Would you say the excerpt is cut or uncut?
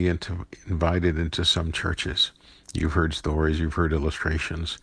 uncut